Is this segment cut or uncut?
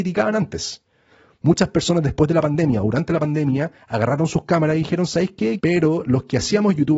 cut